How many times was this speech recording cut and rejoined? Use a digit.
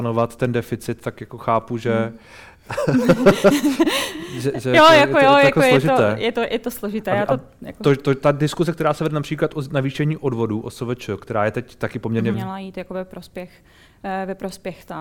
1